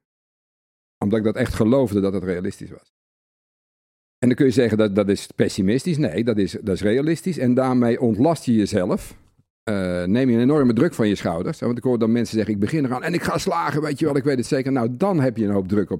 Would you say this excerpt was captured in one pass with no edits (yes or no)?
yes